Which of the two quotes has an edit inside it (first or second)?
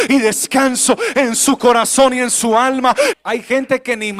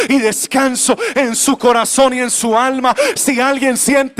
first